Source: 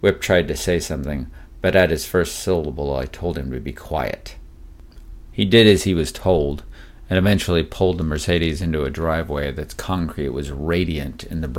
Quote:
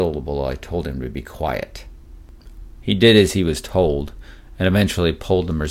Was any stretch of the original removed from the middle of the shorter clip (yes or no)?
no